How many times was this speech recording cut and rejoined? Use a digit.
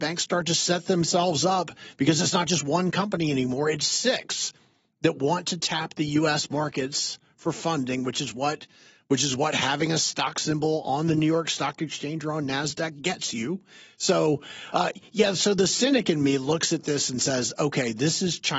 0